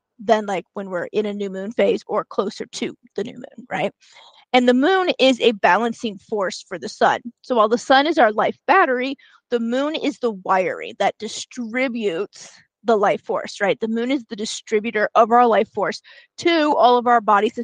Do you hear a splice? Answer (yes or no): no